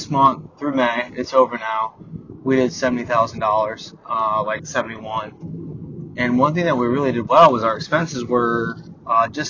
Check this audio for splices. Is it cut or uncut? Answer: uncut